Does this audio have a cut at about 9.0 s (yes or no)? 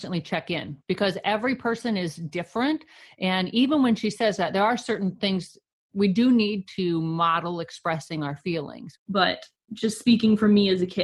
yes